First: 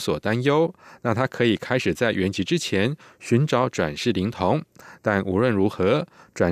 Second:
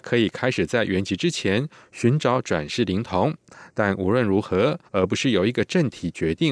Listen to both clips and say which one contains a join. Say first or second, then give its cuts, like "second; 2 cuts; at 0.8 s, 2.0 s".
second; 1 cut; at 4.9 s